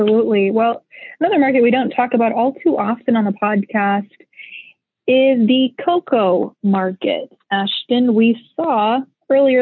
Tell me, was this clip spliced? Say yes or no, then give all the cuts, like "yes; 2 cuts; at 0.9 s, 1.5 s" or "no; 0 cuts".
no; 0 cuts